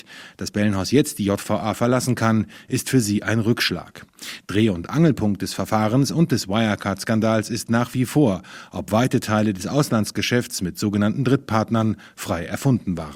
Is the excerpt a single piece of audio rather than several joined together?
yes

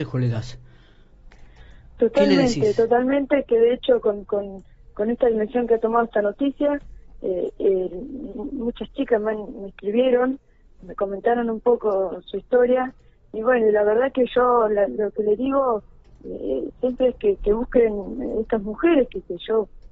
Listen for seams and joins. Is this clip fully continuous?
no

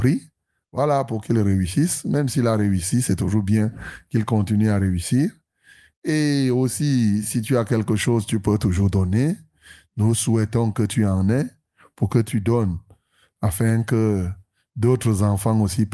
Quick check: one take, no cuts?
yes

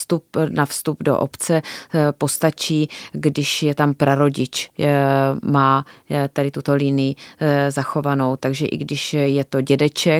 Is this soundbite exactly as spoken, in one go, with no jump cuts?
yes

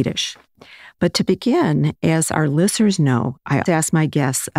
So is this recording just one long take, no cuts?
no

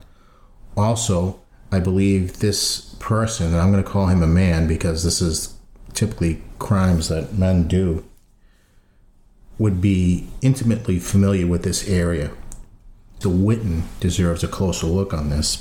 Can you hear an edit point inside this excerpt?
yes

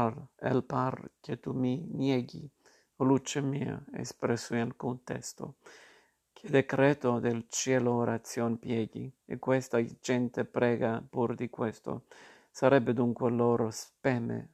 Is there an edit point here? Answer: no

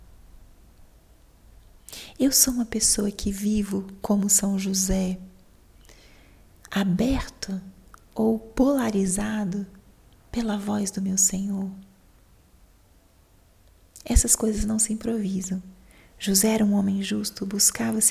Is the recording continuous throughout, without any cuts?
yes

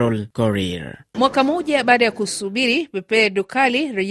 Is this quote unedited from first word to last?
yes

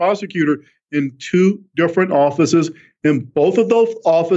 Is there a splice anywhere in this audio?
no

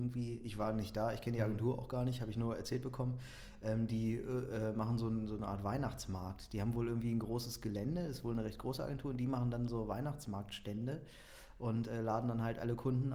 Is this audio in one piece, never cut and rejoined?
yes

